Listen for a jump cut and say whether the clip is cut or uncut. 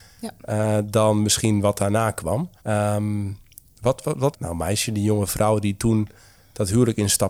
cut